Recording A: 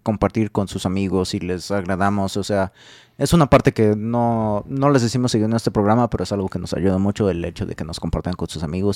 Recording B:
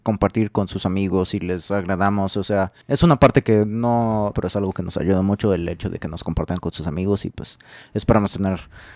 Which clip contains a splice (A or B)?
B